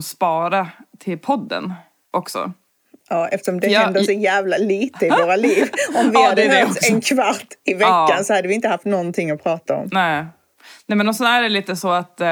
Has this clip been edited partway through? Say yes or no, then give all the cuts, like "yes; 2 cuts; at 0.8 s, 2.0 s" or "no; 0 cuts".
no; 0 cuts